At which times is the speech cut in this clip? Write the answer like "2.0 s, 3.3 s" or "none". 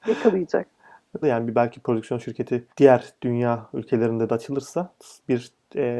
1.2 s, 2.7 s